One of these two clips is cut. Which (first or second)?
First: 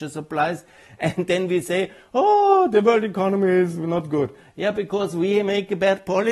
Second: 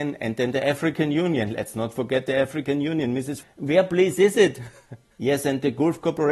second